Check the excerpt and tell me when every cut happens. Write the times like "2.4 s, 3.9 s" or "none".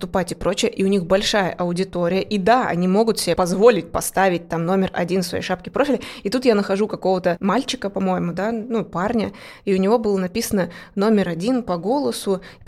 none